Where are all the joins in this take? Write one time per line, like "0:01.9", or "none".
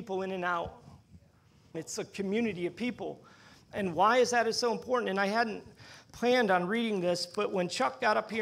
0:01.7